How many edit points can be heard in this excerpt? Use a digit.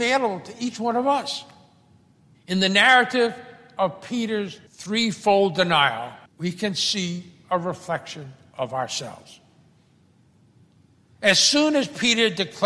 3